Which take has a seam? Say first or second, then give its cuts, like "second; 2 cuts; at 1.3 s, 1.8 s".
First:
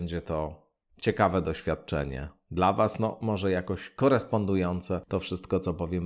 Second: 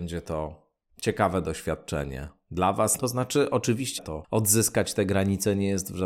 second; 2 cuts; at 3.0 s, 4.0 s